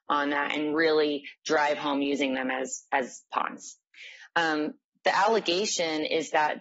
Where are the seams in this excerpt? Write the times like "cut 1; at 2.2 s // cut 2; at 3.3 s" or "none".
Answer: none